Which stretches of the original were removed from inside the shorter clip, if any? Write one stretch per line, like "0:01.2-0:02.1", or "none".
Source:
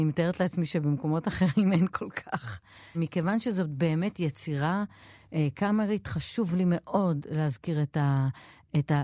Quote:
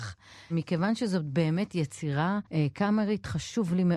0:04.9-0:05.3